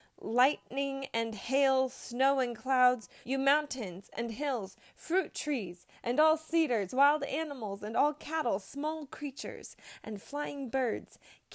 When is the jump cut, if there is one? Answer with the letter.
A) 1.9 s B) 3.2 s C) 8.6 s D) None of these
B